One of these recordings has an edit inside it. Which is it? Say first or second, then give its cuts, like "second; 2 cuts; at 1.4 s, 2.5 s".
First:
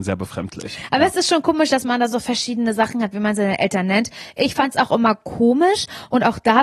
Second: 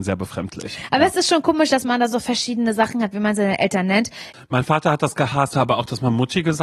second; 2 cuts; at 4.3 s, 5.5 s